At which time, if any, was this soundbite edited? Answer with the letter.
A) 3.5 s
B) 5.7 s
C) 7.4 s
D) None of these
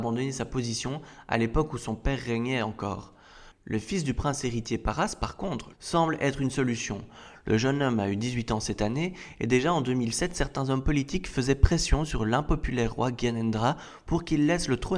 B